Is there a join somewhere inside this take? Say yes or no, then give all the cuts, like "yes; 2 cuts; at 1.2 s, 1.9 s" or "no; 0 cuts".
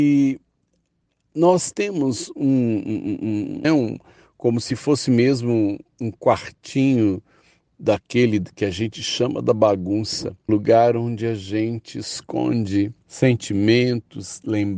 yes; 3 cuts; at 3.6 s, 10.5 s, 13.0 s